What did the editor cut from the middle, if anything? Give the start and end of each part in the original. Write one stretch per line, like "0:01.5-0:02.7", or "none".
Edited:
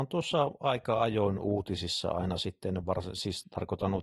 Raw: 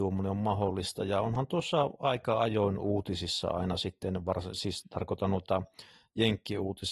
none